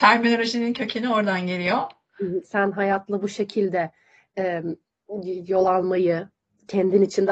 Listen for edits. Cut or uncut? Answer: cut